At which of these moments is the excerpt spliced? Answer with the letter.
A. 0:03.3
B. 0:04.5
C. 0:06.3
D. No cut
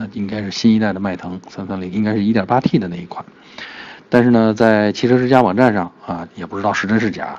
C